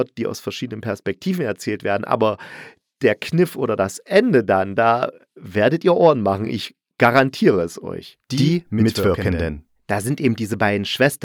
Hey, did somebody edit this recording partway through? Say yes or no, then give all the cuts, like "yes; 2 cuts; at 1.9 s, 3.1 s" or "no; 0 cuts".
no; 0 cuts